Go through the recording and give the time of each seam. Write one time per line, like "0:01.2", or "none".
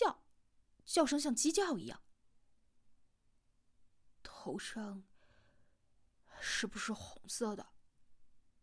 none